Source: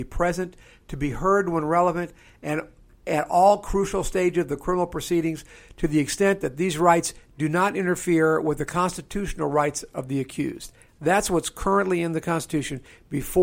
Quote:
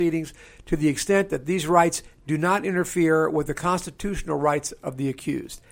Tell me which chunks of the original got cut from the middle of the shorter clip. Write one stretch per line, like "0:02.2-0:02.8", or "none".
none